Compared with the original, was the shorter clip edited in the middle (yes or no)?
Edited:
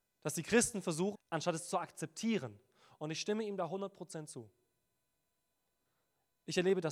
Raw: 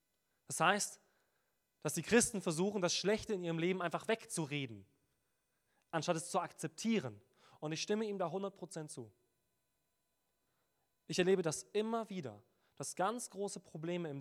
yes